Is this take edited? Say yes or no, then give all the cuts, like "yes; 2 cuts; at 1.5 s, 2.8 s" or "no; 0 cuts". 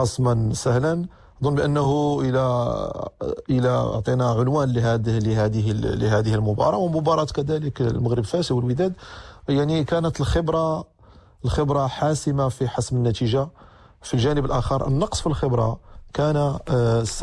no; 0 cuts